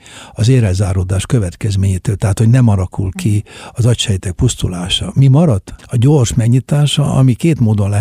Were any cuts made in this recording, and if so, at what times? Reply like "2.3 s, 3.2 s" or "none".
5.8 s

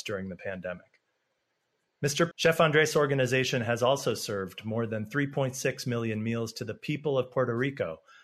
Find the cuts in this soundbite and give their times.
2.3 s

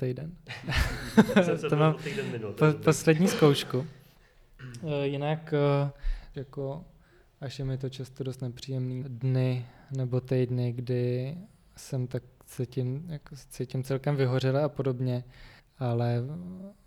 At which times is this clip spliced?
6.3 s, 9.0 s, 15.6 s

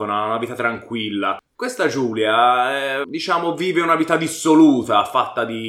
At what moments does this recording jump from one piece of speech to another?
1.6 s, 3.0 s

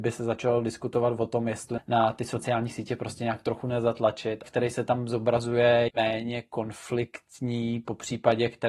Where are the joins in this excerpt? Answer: 1.8 s, 4.4 s, 5.9 s

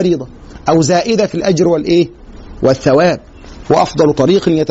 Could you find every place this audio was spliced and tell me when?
3.6 s

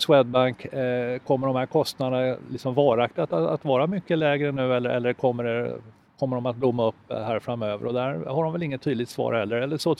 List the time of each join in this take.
none

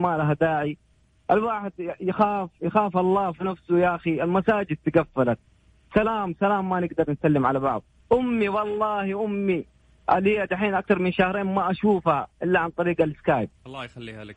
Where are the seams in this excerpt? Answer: none

